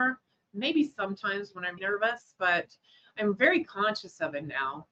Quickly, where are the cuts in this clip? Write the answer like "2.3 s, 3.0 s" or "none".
1.8 s